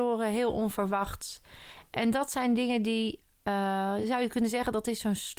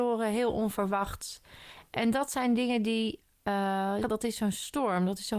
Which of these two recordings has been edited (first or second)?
second